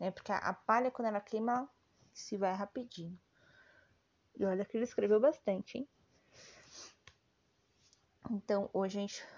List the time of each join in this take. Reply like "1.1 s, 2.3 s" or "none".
4.3 s